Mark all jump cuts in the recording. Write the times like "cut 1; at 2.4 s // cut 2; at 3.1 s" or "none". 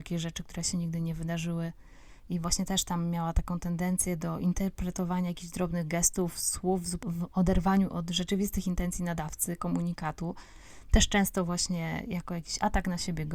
cut 1; at 2.2 s